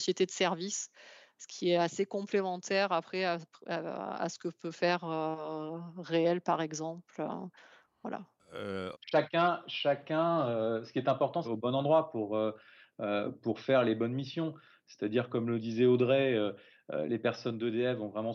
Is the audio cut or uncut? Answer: cut